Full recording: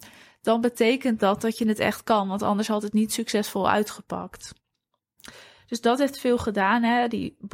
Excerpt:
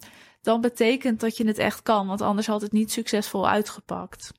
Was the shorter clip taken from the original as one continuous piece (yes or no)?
no